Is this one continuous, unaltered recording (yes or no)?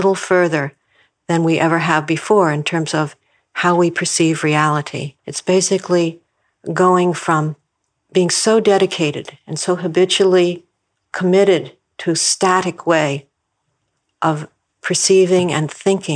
no